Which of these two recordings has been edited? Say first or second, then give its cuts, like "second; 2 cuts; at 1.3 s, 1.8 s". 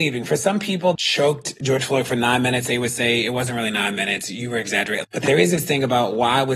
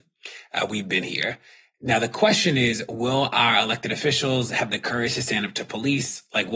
first; 2 cuts; at 0.9 s, 5.0 s